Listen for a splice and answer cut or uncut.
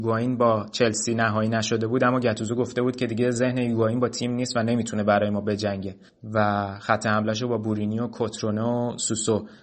cut